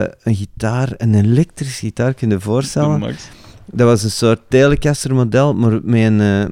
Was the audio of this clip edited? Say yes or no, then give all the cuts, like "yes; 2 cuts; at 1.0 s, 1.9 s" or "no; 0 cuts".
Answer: no; 0 cuts